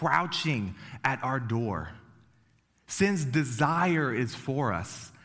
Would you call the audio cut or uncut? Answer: uncut